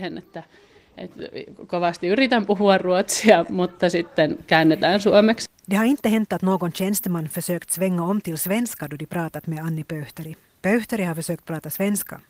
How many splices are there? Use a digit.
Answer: 1